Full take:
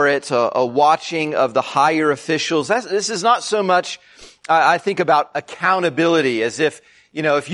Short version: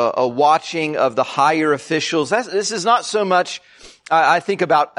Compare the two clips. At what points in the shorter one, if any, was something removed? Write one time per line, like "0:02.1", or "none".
none